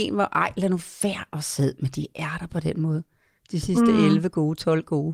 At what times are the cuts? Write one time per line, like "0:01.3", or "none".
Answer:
none